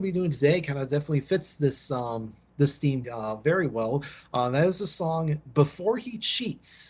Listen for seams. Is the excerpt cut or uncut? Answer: cut